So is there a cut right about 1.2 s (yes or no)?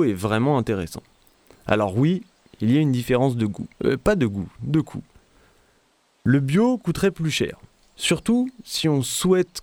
no